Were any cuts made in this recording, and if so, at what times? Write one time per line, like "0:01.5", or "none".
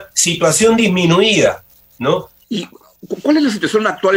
0:02.4

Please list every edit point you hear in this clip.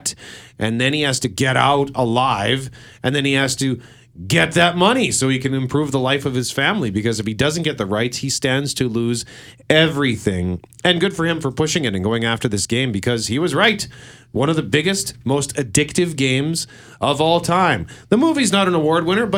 none

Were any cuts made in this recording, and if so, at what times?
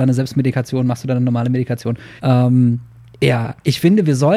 0:02.2

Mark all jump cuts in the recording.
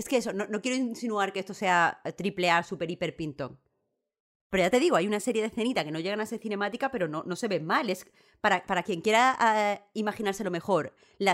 none

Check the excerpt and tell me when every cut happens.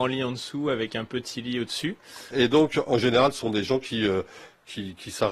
0:02.3

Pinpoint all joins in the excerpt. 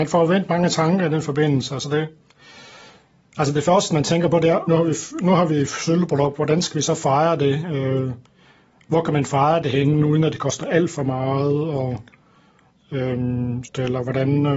0:04.7
0:13.6

